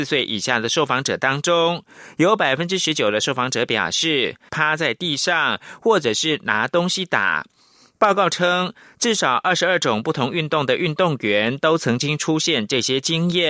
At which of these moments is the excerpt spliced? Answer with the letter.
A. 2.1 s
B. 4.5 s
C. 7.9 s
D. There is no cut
B